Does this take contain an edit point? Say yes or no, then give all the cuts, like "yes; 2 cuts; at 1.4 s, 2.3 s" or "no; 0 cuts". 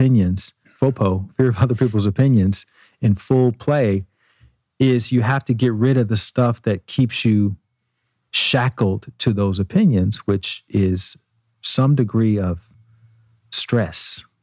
no; 0 cuts